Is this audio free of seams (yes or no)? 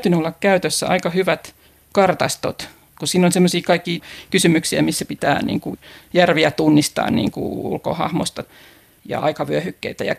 yes